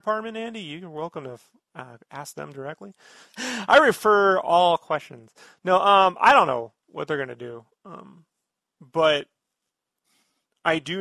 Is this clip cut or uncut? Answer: cut